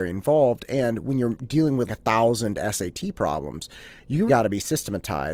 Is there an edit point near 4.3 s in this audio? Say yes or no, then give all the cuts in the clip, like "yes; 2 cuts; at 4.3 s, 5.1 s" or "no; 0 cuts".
yes; 2 cuts; at 1.9 s, 4.3 s